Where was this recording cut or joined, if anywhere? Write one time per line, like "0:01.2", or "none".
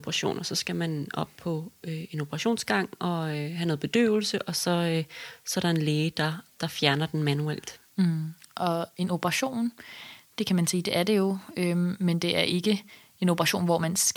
none